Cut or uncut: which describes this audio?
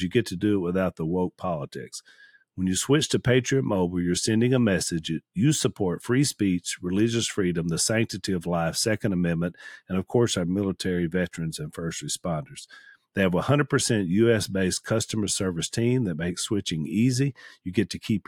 uncut